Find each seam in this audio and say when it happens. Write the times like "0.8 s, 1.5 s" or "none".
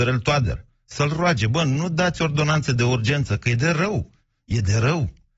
none

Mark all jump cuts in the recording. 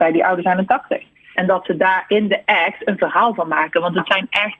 1.4 s

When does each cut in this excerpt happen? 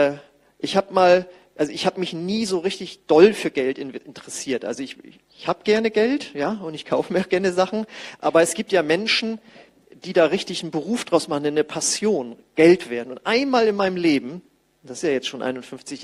none

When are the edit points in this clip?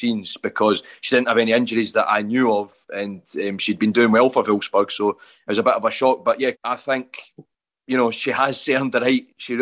6.5 s

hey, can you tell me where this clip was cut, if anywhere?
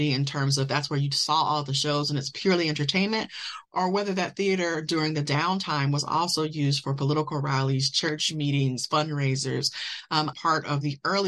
10.3 s

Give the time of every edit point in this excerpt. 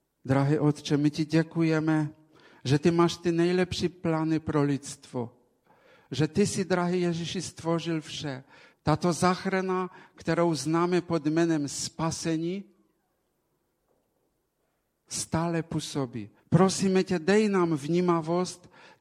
8.7 s, 16.4 s

